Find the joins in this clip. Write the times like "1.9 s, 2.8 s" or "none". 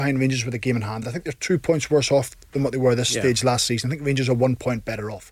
none